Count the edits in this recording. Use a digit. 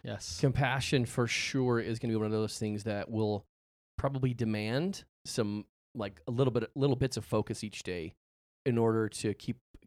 0